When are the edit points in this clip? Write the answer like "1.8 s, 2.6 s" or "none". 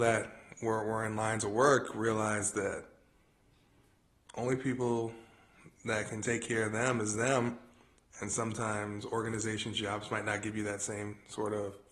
none